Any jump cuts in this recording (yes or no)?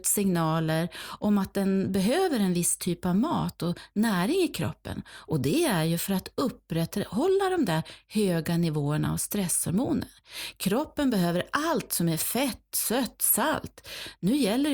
no